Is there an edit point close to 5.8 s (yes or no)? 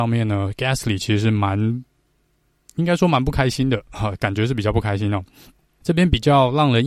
yes